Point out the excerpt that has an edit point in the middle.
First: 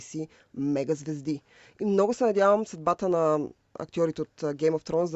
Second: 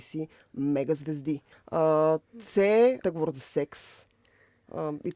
second; 2 cuts; at 1.5 s, 3.0 s

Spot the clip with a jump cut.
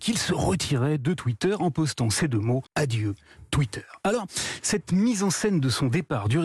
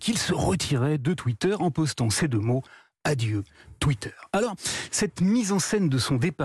first; 1 cut; at 2.7 s

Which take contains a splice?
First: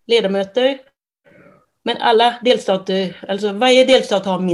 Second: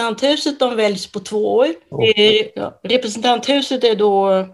second; 1 cut; at 1.9 s

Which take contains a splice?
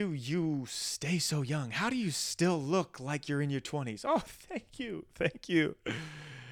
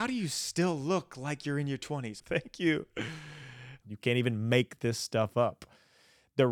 second; 2 cuts; at 2.2 s, 3.8 s

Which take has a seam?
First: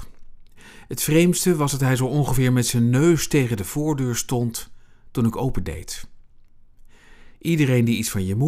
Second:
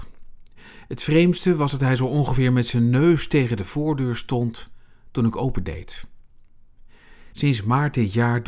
first; 1 cut; at 7.3 s

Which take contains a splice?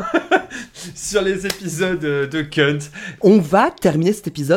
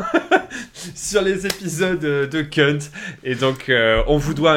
first; 1 cut; at 3.2 s

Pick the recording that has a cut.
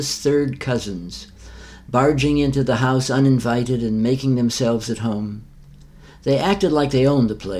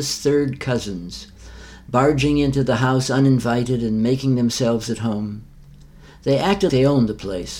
second; 1 cut; at 6.7 s

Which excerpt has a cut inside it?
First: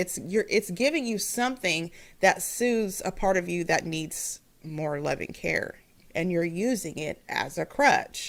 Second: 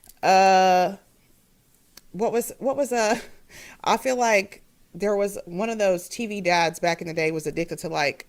first; 1 cut; at 6.0 s

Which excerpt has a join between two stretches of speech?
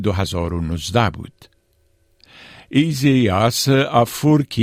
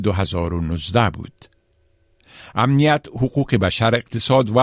second; 1 cut; at 2.4 s

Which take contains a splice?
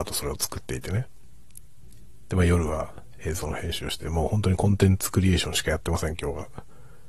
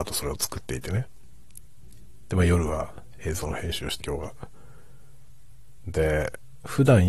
second; 2 cuts; at 4.0 s, 5.8 s

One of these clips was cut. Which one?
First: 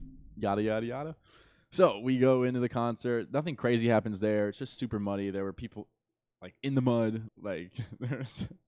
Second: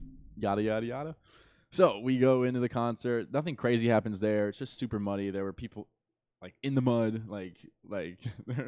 first; 1 cut; at 7.3 s

